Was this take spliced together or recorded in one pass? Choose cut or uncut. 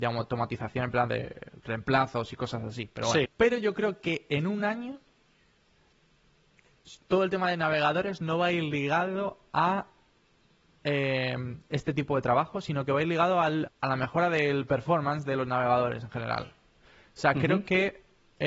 cut